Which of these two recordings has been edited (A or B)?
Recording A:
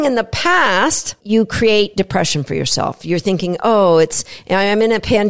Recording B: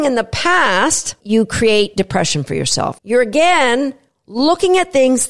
B